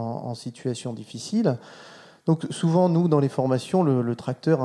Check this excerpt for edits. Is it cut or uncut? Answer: uncut